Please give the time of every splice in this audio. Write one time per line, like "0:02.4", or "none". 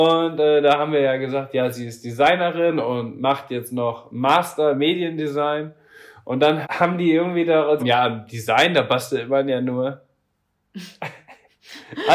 0:06.6
0:07.8